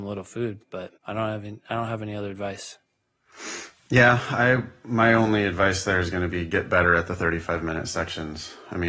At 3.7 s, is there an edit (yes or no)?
no